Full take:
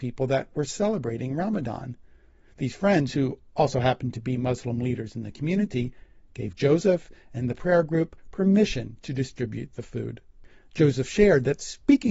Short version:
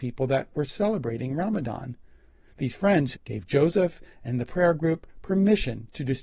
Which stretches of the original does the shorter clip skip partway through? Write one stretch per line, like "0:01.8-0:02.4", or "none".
0:03.1-0:06.2